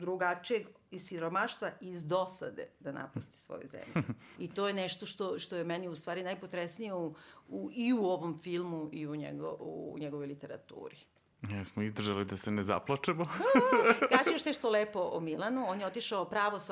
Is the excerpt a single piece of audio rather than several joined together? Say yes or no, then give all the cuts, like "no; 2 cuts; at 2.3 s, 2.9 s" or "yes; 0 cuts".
no; 1 cut; at 4.4 s